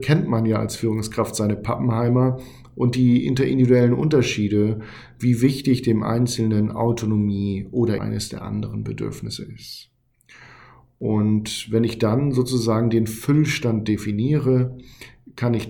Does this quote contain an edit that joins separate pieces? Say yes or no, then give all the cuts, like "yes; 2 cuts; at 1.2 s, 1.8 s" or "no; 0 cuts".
yes; 1 cut; at 8.0 s